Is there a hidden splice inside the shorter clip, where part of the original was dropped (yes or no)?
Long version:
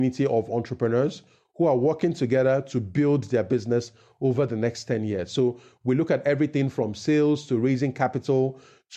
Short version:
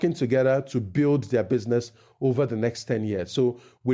no